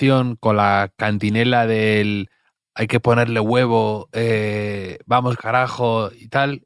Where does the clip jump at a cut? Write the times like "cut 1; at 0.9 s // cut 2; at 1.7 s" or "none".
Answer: none